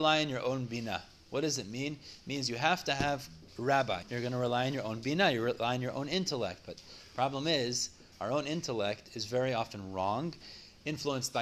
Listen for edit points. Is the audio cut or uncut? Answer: cut